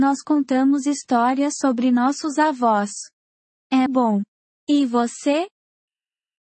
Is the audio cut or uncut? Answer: cut